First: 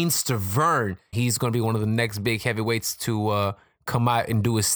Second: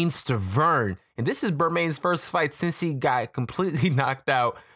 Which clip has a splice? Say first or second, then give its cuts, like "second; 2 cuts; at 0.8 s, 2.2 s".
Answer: first; 1 cut; at 1.1 s